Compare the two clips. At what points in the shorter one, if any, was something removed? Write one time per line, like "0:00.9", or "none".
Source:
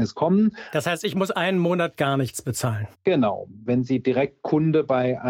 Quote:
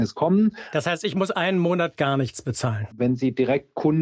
0:02.9